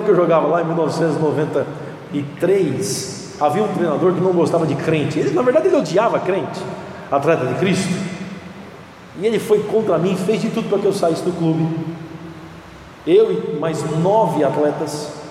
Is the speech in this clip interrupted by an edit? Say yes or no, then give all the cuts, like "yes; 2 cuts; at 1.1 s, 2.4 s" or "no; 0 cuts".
no; 0 cuts